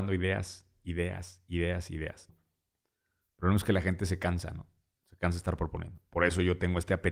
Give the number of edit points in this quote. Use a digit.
1